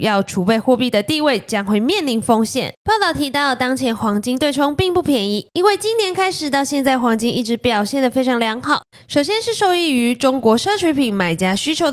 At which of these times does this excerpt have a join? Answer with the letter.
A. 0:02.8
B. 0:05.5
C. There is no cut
A